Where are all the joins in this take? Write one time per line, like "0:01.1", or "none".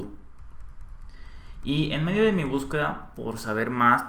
none